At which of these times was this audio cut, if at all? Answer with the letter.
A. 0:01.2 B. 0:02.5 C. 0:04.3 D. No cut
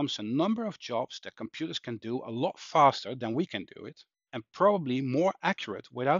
C